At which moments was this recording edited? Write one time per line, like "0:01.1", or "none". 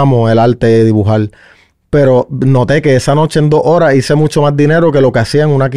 none